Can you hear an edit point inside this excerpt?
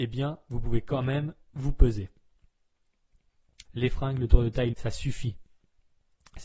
yes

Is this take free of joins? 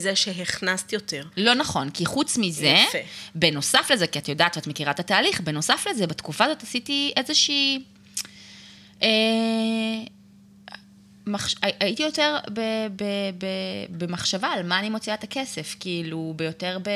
yes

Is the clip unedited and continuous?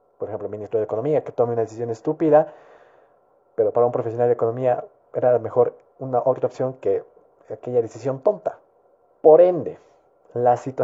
no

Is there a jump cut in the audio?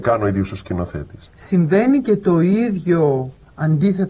yes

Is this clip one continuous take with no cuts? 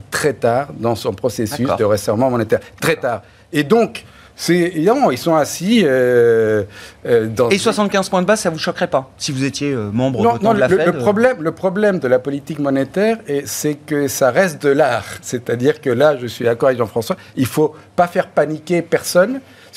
yes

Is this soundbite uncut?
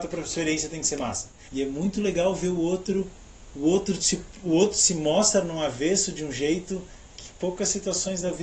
no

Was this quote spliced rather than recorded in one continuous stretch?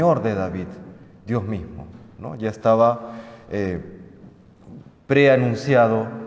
no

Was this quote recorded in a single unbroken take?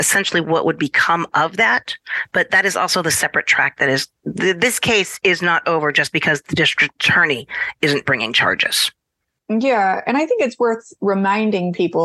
yes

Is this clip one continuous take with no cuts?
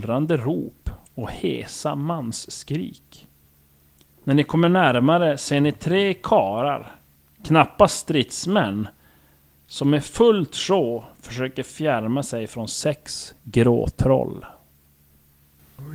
yes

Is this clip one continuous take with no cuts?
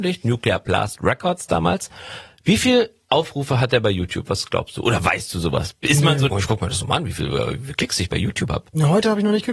no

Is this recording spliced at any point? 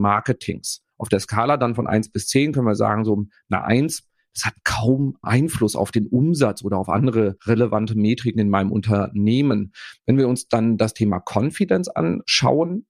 yes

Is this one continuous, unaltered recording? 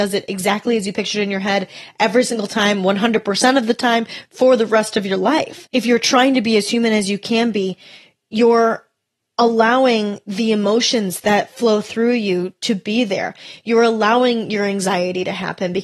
yes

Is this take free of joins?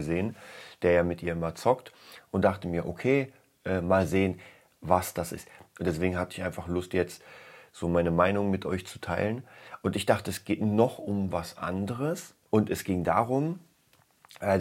no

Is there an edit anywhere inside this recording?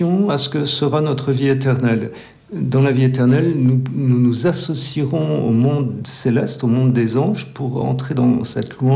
no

